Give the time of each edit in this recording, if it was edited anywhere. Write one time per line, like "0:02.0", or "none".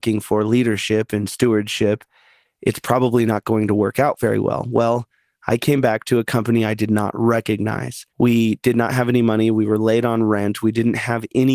0:08.1